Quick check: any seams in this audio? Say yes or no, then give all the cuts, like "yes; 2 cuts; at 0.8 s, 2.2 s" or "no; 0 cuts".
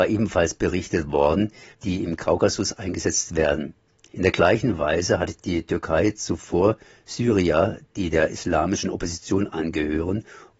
yes; 2 cuts; at 1.7 s, 4.1 s